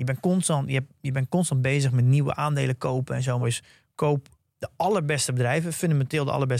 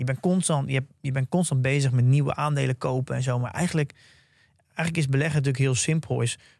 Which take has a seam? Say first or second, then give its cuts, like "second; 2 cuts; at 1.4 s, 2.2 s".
first; 1 cut; at 3.4 s